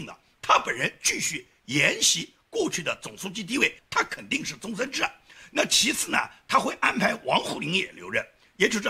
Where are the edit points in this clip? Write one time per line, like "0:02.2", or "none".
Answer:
0:03.8